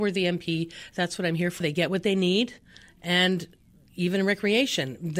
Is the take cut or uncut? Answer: cut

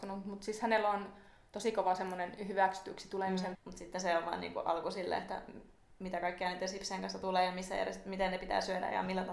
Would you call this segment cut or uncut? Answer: cut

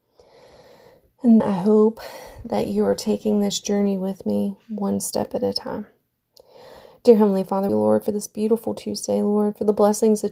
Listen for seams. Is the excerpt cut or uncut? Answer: cut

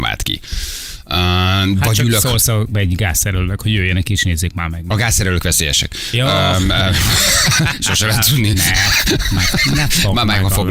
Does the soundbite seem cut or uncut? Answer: uncut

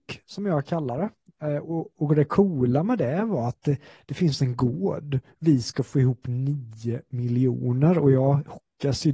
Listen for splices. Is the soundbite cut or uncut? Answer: uncut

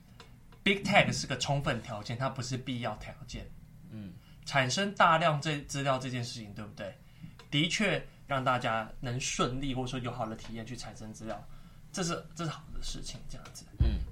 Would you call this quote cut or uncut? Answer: cut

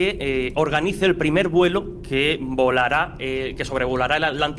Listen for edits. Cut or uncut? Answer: uncut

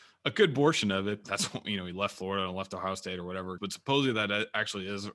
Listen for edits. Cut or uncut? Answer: cut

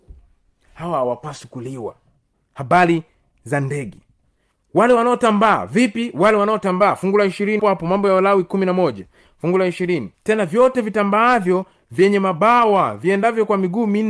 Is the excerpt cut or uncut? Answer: cut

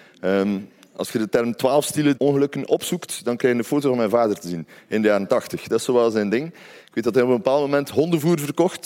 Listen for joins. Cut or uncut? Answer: cut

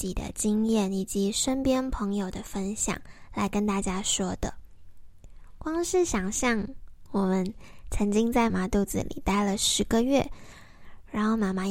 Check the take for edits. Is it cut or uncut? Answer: cut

